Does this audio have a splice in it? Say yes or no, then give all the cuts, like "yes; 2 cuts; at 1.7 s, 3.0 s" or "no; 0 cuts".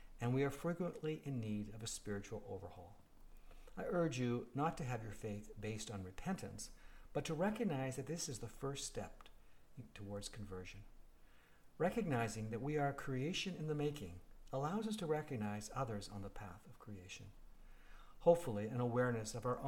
no; 0 cuts